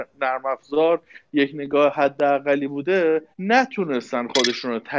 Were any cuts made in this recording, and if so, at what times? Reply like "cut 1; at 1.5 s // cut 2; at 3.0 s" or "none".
cut 1; at 3.3 s